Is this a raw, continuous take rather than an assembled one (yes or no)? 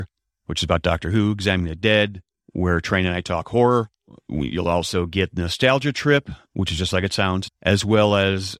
no